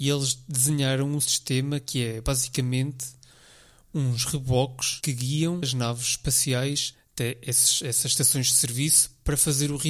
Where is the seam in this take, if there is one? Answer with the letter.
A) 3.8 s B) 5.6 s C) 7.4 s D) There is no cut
B